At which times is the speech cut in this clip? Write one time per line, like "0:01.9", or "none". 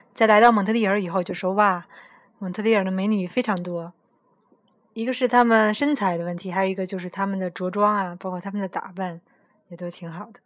none